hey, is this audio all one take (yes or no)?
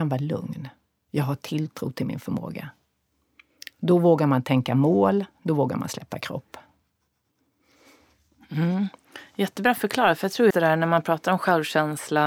no